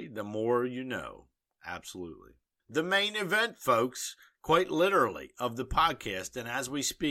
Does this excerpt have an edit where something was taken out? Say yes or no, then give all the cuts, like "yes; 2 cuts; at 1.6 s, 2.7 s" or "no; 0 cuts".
no; 0 cuts